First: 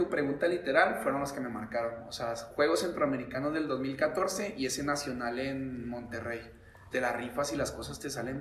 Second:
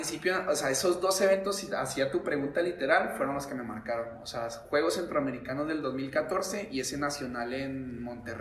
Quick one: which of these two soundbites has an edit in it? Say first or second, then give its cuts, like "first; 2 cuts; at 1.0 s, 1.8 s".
first; 1 cut; at 6.9 s